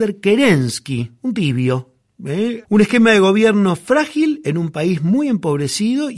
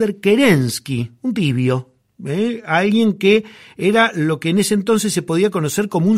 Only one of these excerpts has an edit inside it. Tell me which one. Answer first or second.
first